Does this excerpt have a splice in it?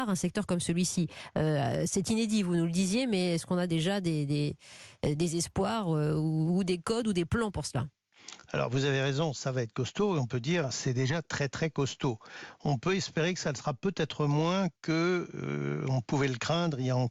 no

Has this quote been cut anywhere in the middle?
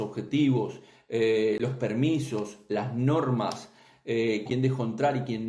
yes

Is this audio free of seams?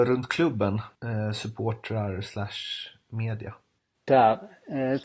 no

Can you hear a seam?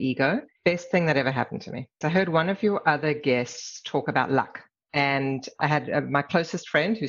yes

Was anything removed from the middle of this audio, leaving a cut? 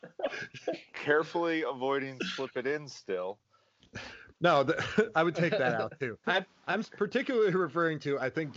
yes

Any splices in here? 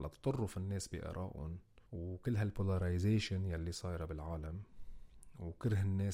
yes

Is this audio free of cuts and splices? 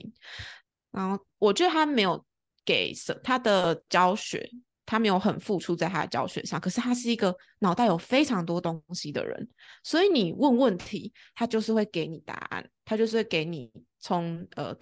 no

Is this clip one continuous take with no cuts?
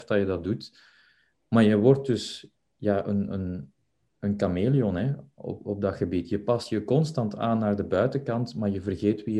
yes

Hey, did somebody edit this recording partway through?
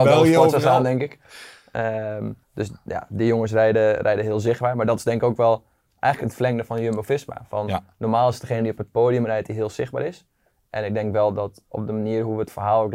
yes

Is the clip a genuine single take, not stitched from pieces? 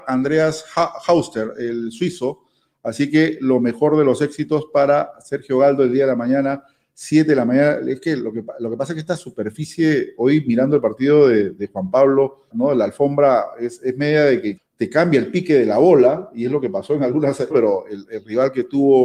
no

